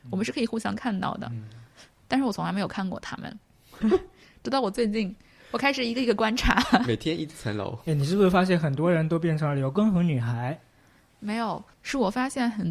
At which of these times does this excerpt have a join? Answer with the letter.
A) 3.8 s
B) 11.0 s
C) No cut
A